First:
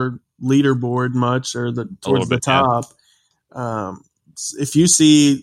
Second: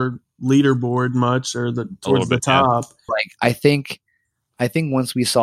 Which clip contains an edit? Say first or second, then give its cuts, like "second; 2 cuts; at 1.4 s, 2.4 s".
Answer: second; 1 cut; at 3.1 s